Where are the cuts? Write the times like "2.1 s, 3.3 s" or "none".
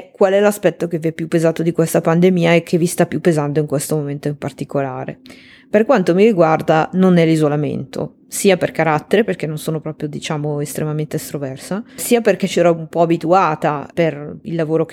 none